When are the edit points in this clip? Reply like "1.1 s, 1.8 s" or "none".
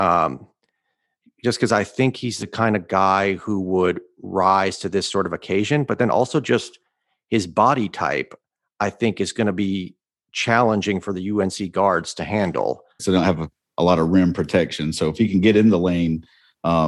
13.0 s